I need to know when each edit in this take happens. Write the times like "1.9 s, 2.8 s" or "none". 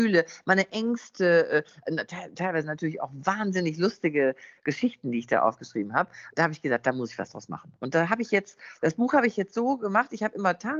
none

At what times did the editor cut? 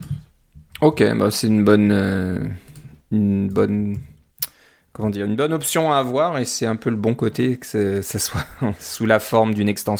none

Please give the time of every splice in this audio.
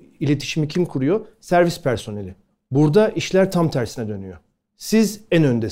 none

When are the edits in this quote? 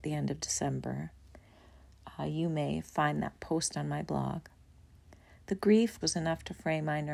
6.0 s

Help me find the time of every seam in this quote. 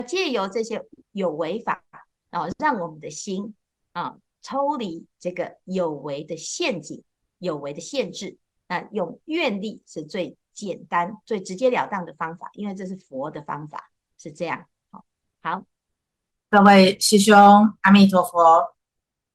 none

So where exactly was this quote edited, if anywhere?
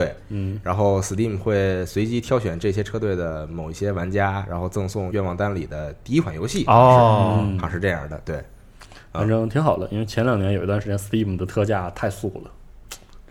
5.1 s

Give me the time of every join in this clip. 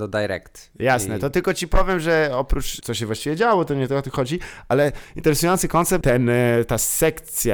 2.8 s, 6.0 s

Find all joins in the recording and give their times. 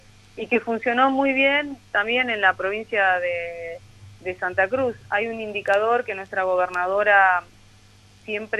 none

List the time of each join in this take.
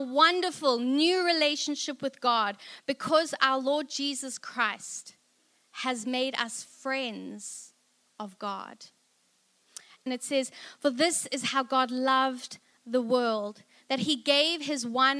10.1 s

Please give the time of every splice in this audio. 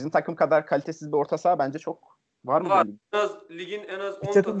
none

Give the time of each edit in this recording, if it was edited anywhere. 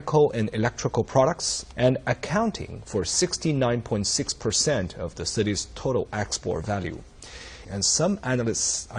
1.7 s, 7.7 s

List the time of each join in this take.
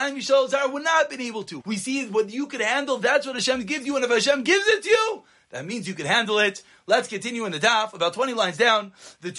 1.6 s

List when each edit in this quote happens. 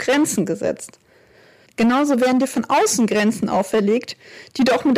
1.7 s

